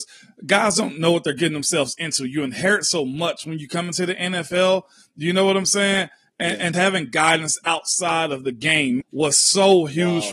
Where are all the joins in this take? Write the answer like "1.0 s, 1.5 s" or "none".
6.7 s, 9.0 s